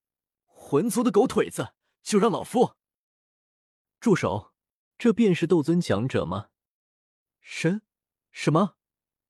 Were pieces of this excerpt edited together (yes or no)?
yes